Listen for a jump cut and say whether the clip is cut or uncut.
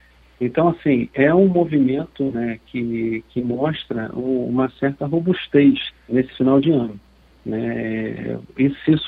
cut